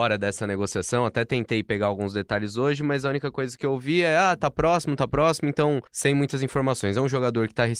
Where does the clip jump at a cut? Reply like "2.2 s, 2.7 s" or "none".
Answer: 5.9 s